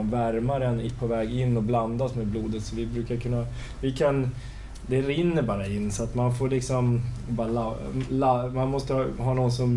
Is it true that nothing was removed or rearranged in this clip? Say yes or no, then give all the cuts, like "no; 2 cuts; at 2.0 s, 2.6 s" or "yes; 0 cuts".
yes; 0 cuts